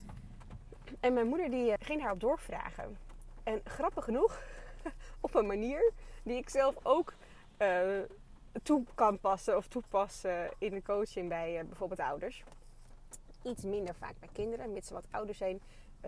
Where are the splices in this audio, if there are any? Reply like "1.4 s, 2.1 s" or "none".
1.8 s

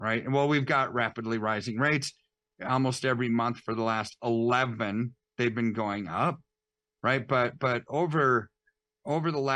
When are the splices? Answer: none

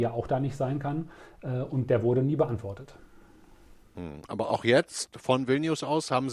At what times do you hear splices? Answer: none

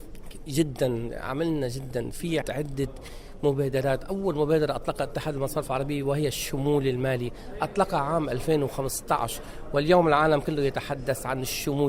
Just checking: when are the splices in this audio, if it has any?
2.4 s

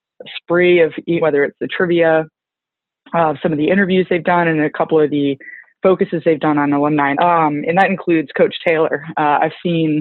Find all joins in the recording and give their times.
1.2 s, 7.1 s

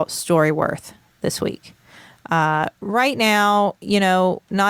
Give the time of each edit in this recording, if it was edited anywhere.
none

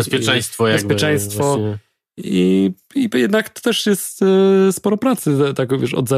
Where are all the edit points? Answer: none

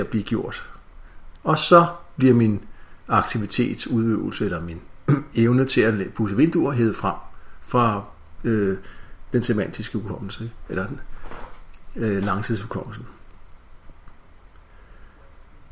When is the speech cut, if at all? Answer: 1.4 s

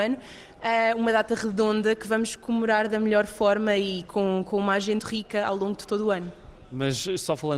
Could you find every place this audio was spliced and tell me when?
5.0 s

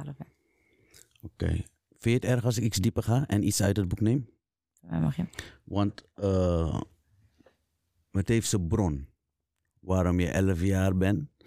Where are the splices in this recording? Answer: none

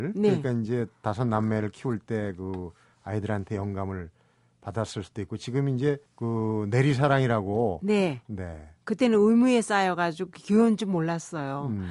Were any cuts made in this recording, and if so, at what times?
6.1 s, 8.2 s

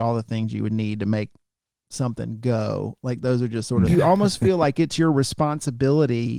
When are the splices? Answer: 3.9 s

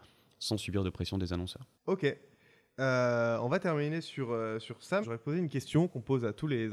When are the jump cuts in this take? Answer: 1.7 s, 5.0 s

